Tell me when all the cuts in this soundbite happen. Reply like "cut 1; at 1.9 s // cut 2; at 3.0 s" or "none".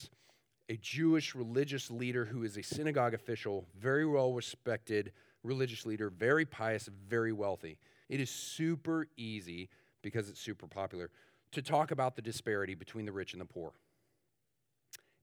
cut 1; at 8.0 s